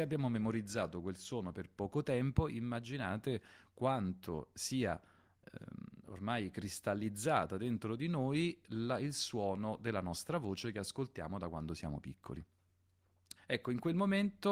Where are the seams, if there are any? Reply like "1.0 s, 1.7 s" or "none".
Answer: 13.4 s